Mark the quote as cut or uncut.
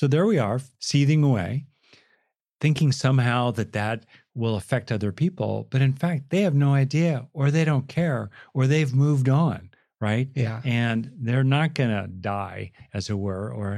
uncut